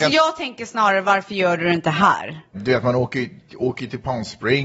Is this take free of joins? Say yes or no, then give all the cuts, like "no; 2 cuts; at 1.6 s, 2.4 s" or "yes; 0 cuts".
no; 1 cut; at 2.5 s